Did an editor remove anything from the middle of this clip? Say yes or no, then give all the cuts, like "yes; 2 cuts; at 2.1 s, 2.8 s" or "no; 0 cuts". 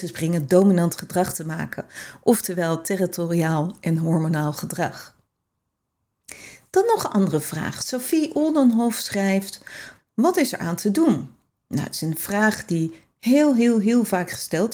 yes; 1 cut; at 10.0 s